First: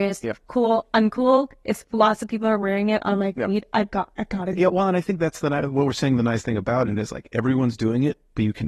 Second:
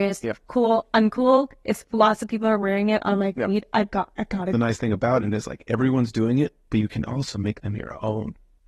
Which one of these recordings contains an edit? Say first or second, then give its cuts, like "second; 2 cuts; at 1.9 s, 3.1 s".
second; 1 cut; at 4.5 s